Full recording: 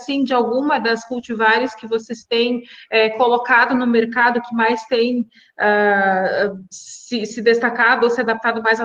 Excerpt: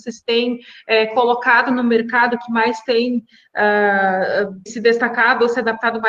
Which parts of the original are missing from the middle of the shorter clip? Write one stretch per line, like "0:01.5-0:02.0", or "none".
0:06.7-0:07.3

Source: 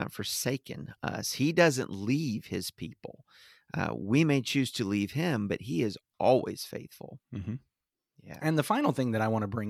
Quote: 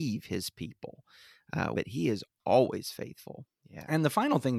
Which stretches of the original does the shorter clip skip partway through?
0:04.0-0:05.5
0:07.2-0:08.0

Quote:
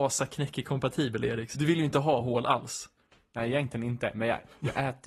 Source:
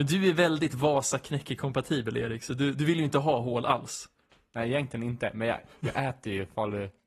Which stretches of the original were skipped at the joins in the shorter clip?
0:02.5-0:02.7

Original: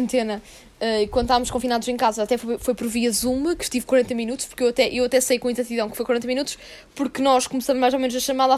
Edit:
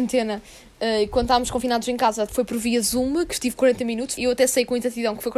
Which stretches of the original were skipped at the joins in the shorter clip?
0:02.3-0:02.6
0:04.5-0:04.9

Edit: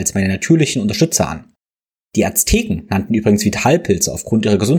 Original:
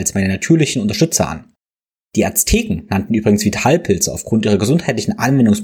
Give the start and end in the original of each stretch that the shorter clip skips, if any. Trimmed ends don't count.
none

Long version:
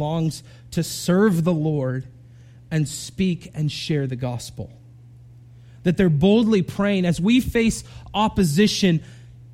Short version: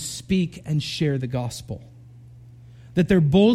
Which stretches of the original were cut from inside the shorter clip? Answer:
none

